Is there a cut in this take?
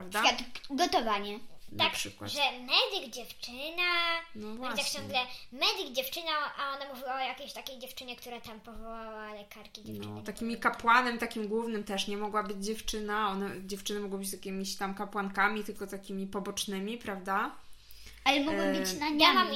no; 0 cuts

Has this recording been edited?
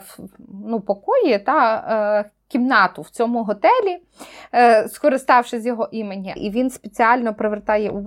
yes; 1 cut; at 6.4 s

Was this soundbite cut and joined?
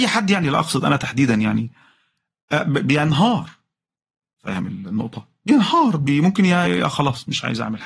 yes; 1 cut; at 6.6 s

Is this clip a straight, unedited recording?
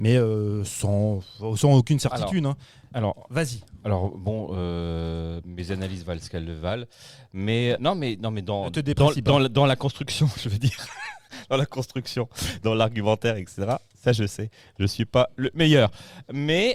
no; 1 cut; at 7.8 s

